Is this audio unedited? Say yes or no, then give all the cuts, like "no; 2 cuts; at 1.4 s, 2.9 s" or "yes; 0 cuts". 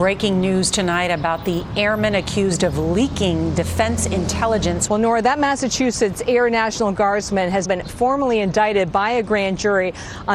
no; 2 cuts; at 4.9 s, 7.7 s